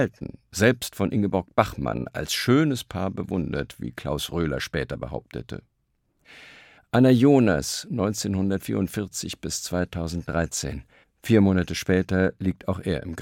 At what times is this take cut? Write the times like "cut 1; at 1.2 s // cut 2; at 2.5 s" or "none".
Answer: cut 1; at 6.8 s // cut 2; at 11.0 s